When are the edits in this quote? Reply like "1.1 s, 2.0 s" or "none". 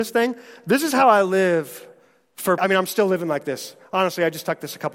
2.6 s